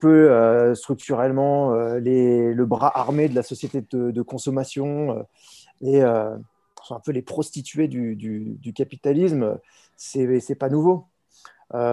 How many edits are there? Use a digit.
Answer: 0